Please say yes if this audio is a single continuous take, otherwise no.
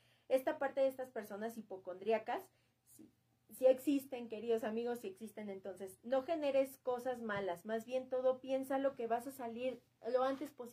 yes